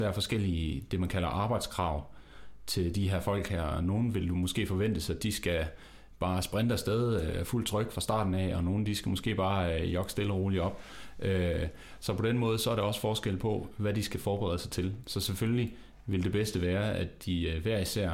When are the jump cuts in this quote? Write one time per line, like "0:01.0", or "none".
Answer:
none

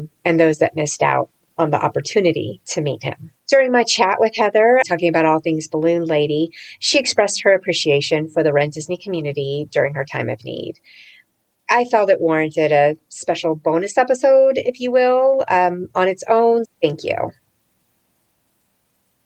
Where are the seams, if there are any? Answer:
0:03.4
0:04.8
0:16.6

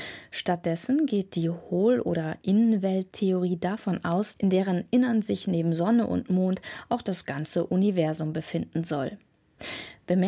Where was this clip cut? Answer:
0:04.4

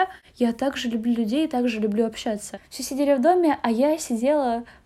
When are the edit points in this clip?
0:02.6

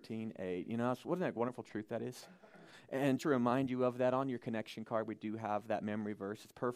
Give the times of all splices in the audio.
0:03.2

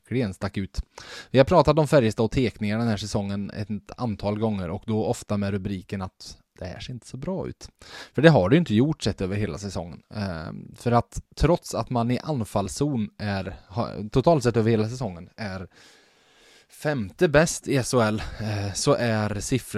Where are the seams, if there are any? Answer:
none

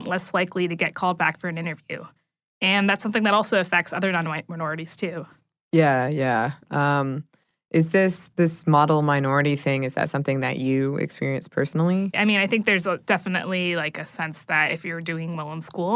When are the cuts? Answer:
0:12.1

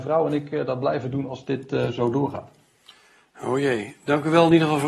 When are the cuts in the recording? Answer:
none

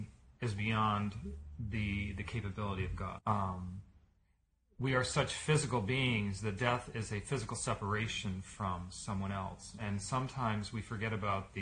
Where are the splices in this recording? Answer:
0:03.2

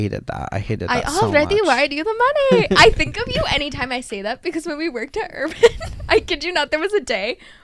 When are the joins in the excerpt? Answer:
none

